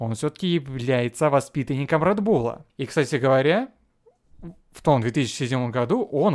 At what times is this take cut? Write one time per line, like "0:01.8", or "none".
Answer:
0:02.7